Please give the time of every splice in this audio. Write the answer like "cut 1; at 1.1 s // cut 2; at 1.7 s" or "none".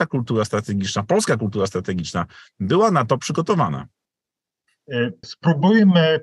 cut 1; at 5.2 s